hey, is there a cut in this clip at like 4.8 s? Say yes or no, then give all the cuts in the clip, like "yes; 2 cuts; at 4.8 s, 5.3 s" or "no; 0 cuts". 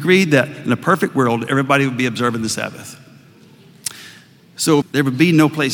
yes; 1 cut; at 4.8 s